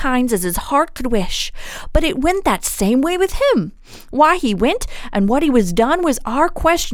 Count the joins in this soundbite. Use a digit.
1